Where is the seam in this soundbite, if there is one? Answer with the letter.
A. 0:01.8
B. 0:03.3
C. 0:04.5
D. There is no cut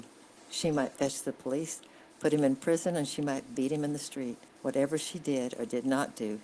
C